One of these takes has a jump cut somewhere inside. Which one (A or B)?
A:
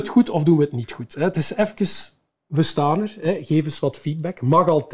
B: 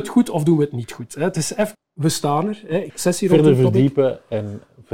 B